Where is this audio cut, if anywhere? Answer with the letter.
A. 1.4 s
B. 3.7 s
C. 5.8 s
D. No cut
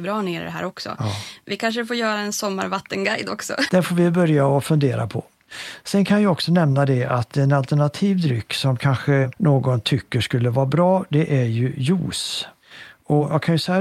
B